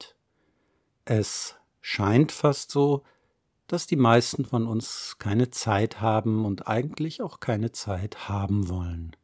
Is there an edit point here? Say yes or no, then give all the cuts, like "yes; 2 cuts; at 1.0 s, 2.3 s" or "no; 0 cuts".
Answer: no; 0 cuts